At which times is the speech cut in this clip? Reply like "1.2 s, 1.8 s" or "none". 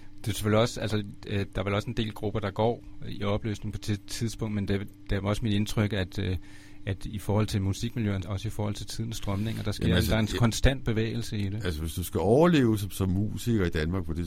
8.2 s

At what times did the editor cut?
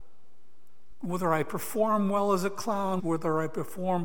0.9 s, 3.0 s

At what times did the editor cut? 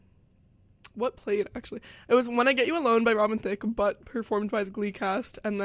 none

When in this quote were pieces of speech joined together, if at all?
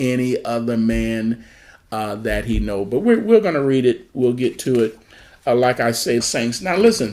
6.2 s

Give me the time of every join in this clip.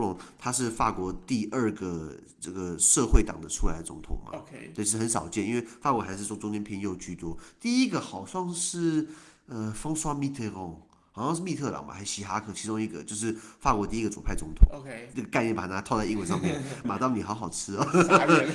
15.1 s, 16.8 s

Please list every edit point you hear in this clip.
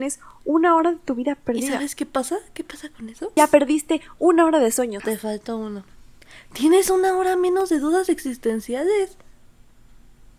3.4 s, 5.0 s

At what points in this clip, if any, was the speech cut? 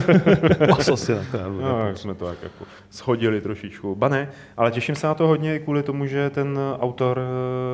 none

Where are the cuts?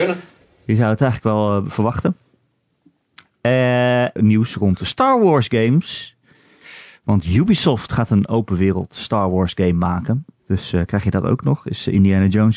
4.2 s, 10.4 s

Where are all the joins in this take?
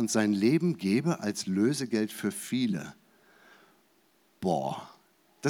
none

